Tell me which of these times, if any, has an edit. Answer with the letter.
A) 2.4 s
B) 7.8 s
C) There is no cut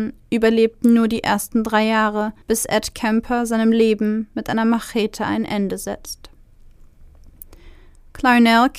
A